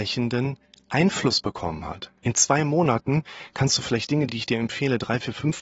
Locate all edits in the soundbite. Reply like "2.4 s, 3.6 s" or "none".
none